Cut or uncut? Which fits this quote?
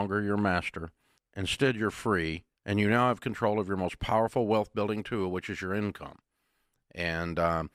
cut